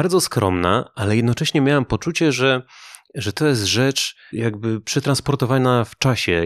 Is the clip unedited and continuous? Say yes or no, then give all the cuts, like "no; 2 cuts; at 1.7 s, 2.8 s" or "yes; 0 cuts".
no; 1 cut; at 4.3 s